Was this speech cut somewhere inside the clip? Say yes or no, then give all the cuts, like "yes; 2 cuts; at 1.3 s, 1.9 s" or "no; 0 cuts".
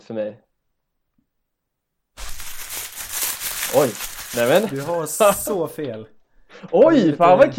no; 0 cuts